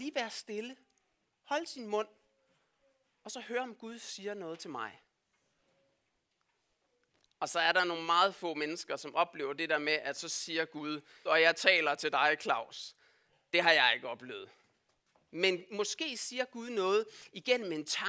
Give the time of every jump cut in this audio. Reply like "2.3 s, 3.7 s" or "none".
11.3 s